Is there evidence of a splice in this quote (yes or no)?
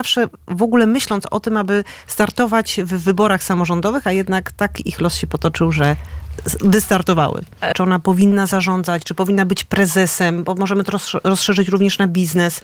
yes